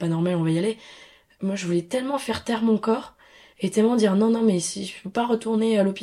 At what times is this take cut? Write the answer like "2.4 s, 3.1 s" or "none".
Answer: none